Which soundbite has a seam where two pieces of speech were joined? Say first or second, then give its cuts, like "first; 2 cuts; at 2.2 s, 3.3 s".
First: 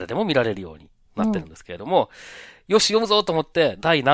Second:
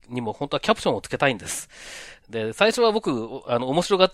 second; 1 cut; at 2.2 s